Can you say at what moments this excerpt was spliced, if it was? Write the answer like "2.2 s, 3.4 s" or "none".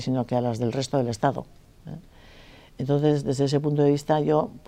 none